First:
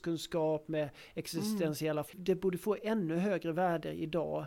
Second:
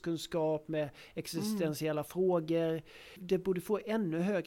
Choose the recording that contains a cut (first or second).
first